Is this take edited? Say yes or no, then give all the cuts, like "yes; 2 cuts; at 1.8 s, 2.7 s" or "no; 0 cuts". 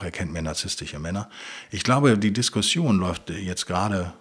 no; 0 cuts